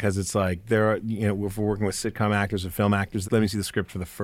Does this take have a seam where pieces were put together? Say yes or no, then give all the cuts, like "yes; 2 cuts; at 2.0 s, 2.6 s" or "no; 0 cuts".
yes; 1 cut; at 3.2 s